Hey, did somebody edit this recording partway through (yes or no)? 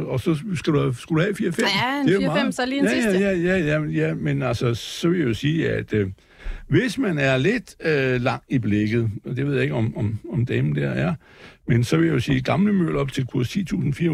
no